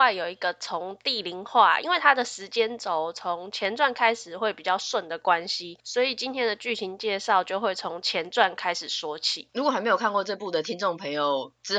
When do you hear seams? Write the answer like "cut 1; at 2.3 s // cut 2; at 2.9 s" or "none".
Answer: cut 1; at 1.8 s